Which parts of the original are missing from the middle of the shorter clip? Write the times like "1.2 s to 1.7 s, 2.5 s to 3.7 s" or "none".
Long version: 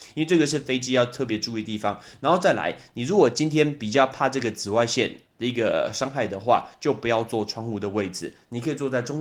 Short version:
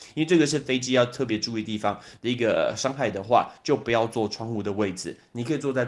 2.2 s to 5.3 s